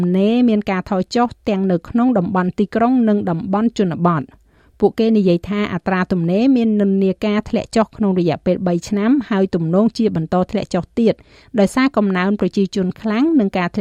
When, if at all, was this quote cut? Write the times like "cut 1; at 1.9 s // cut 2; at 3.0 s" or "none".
none